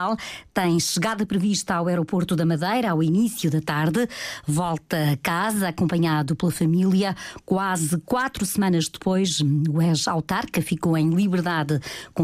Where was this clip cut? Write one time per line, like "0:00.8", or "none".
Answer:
none